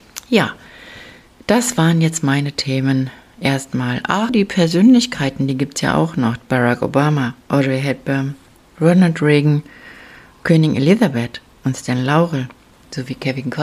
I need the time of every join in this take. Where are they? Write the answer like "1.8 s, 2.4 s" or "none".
4.3 s, 7.4 s